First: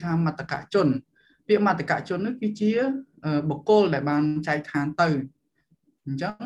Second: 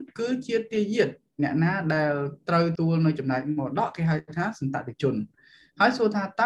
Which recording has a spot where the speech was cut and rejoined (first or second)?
second